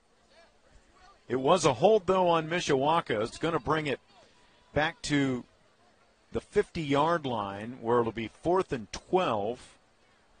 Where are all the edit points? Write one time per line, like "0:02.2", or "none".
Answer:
0:03.3